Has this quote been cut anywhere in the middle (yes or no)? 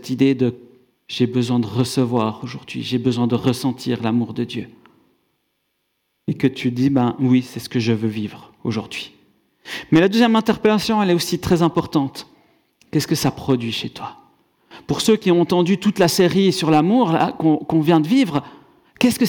no